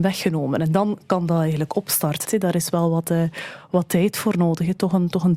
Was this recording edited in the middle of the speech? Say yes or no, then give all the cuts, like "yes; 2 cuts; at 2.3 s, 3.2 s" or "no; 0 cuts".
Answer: yes; 1 cut; at 2.2 s